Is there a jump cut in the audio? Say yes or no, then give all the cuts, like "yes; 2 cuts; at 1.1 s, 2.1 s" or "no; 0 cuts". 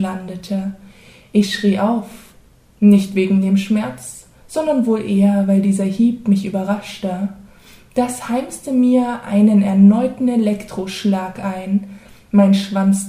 no; 0 cuts